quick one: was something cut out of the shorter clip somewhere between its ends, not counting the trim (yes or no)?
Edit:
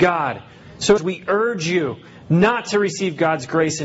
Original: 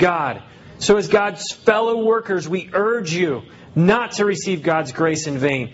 yes